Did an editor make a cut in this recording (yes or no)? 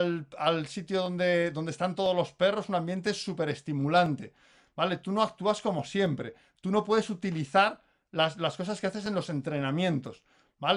no